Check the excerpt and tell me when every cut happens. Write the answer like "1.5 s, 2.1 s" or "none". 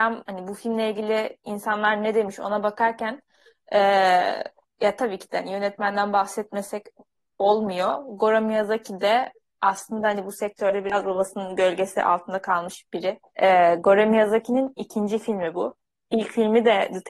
13.2 s